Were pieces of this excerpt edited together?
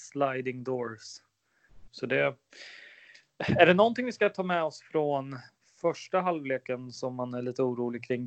yes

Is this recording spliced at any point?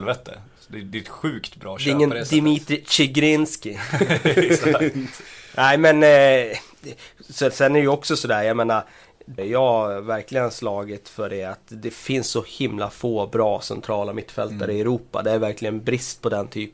yes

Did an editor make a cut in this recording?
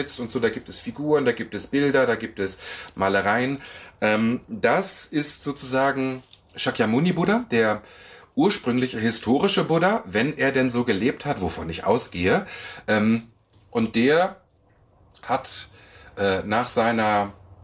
no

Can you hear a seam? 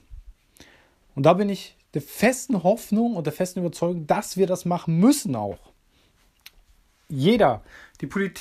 no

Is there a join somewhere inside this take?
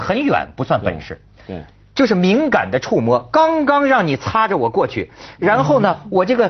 no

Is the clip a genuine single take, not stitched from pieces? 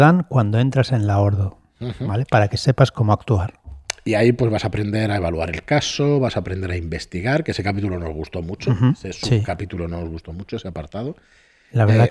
yes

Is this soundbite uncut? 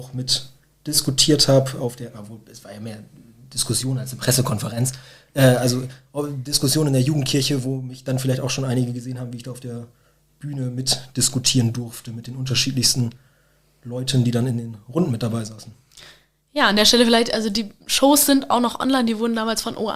yes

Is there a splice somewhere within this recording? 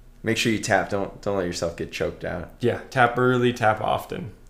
no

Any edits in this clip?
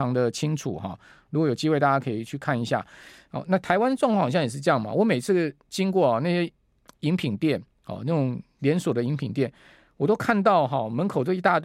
no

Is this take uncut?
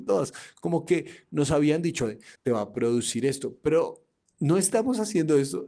no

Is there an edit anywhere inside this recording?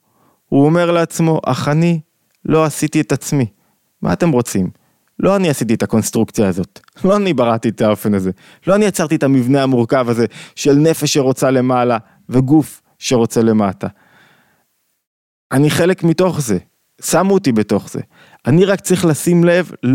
no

